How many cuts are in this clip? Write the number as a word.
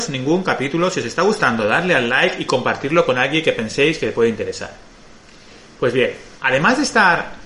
zero